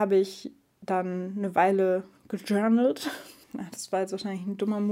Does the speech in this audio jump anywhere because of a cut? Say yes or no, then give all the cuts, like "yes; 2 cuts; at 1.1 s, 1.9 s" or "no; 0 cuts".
yes; 1 cut; at 3.4 s